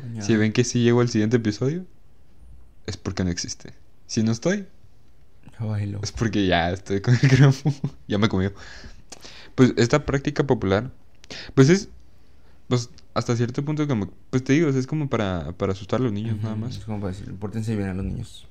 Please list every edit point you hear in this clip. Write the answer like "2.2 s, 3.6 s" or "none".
none